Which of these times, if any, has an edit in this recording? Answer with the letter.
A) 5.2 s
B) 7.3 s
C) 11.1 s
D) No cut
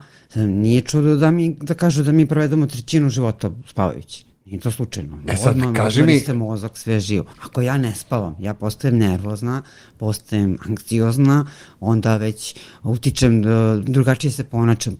B